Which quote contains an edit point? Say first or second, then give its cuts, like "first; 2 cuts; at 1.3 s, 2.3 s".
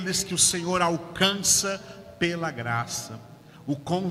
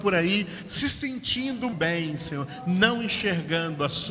second; 1 cut; at 1.7 s